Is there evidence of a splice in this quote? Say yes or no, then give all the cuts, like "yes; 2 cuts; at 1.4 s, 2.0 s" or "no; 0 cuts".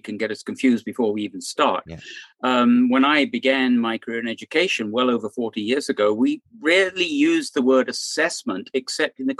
no; 0 cuts